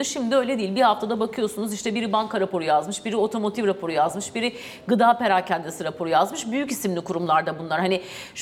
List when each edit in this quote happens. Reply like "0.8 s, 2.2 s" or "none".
none